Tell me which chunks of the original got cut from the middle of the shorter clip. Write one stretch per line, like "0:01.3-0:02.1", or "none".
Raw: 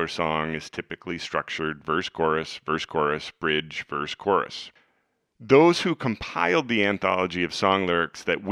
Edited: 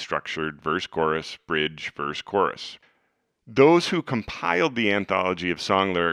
0:02.6-0:03.3